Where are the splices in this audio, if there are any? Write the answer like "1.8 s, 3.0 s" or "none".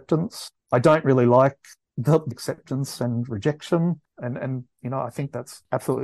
2.3 s, 4.1 s

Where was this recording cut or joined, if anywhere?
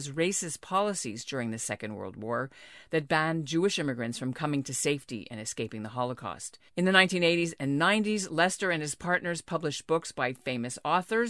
6.7 s

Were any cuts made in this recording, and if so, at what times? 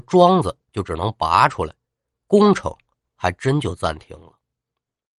none

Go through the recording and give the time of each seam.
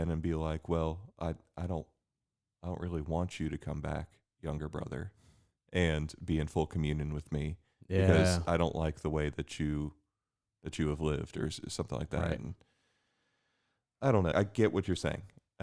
14.3 s

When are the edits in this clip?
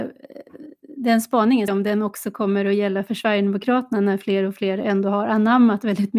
1.7 s

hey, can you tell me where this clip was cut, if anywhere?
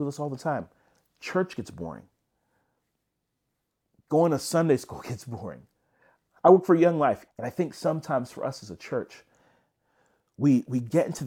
7.3 s

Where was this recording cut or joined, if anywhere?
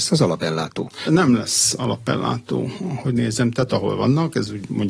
1.0 s, 3.7 s

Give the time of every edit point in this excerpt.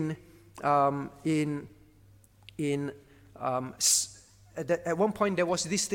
none

